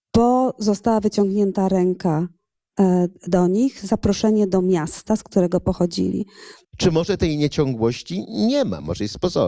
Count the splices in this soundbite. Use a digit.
1